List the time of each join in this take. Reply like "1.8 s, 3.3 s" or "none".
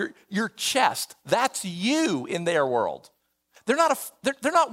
3.6 s